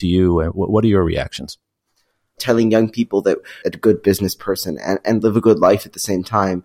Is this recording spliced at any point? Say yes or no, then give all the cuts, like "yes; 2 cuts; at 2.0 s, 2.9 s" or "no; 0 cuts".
yes; 2 cuts; at 2.4 s, 3.6 s